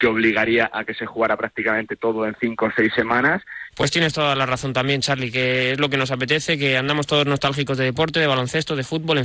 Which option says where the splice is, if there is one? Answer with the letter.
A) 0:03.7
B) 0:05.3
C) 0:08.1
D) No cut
A